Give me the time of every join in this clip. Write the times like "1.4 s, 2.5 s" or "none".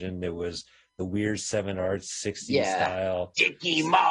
none